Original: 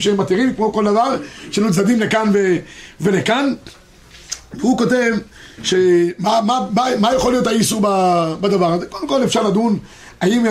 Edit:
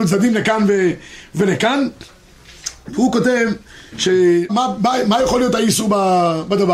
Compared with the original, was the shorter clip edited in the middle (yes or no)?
yes